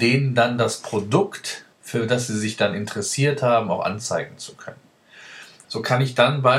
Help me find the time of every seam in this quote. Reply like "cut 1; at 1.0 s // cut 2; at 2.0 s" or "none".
cut 1; at 1.7 s // cut 2; at 5.6 s